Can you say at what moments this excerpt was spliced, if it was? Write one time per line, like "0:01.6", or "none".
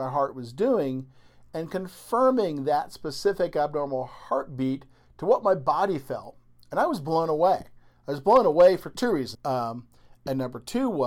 0:09.3